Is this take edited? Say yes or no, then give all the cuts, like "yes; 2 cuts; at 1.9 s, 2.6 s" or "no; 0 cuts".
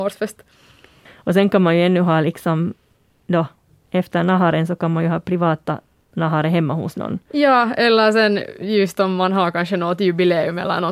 yes; 1 cut; at 1.1 s